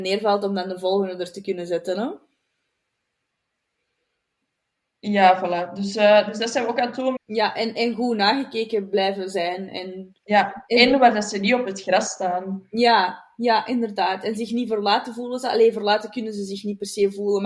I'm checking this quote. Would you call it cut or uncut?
cut